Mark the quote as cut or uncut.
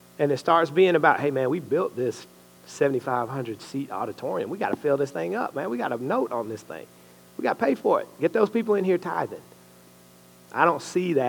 uncut